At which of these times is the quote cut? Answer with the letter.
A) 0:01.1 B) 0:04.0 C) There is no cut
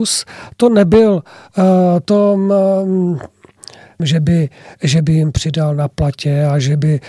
B